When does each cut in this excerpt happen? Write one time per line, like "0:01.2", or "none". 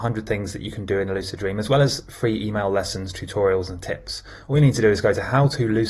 none